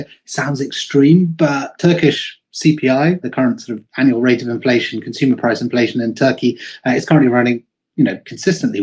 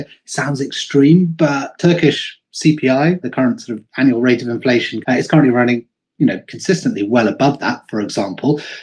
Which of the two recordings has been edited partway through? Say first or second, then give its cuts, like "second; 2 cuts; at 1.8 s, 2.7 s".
second; 1 cut; at 5.0 s